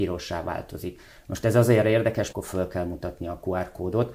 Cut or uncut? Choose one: cut